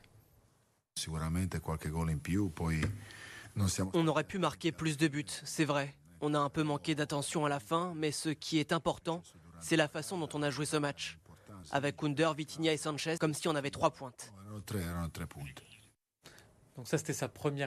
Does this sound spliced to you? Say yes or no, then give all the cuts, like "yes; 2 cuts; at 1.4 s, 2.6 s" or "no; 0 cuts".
yes; 2 cuts; at 11.6 s, 13.2 s